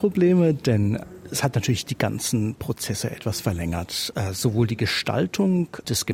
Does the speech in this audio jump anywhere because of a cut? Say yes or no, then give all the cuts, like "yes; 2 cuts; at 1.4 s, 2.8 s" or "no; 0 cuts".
yes; 1 cut; at 4.1 s